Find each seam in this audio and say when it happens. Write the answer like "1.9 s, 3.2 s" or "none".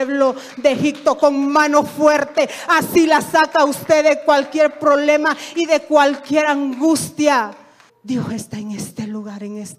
7.9 s